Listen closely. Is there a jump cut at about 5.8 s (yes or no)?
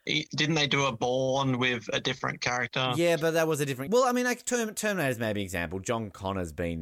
no